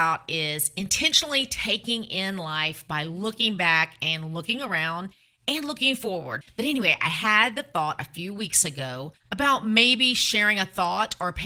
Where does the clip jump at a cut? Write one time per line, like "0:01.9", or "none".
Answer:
0:06.4
0:09.2

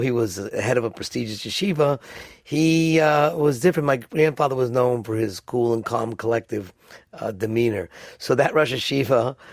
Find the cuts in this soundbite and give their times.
none

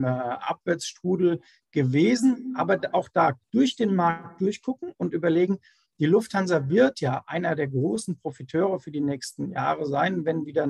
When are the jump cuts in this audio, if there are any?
none

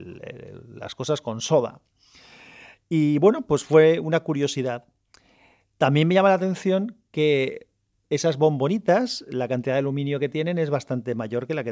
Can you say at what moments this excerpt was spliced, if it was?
none

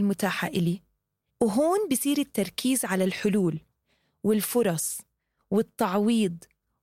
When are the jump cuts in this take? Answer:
0:01.3

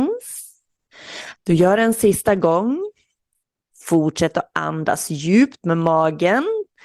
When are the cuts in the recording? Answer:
0:01.3
0:03.7

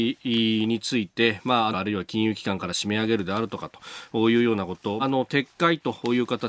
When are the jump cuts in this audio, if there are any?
0:01.7
0:05.0

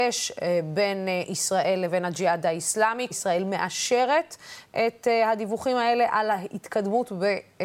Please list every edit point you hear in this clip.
0:03.1

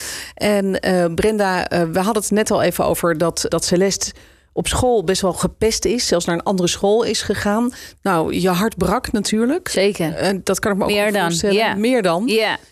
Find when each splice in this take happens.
0:03.5
0:07.9

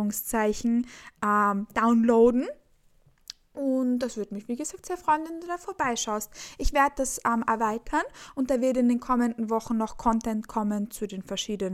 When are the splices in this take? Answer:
none

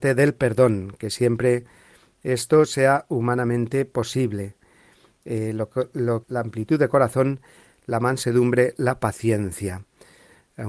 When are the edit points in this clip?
0:06.2

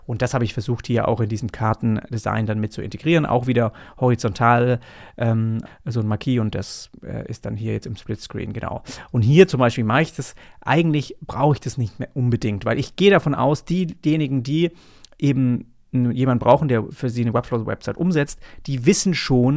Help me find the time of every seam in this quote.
0:05.7

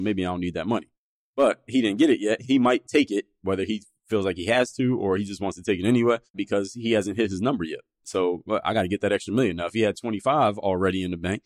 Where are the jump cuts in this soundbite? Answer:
0:06.3

